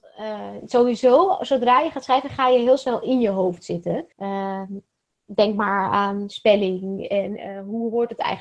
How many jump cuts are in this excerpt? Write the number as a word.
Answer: one